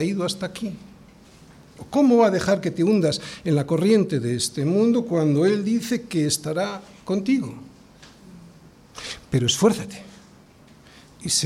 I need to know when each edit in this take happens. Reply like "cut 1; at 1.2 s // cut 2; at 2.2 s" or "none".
none